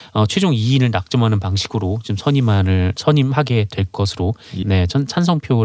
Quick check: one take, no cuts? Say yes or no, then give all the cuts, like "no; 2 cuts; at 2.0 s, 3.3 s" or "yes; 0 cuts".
no; 1 cut; at 4.6 s